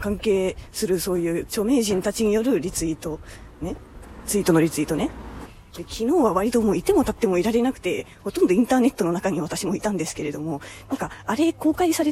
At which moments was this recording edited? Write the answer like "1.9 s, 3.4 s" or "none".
none